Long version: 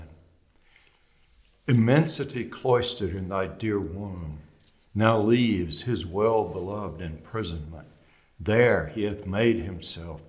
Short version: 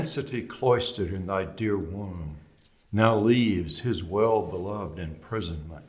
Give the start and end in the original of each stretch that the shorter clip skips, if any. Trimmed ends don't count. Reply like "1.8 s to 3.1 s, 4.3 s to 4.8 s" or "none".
none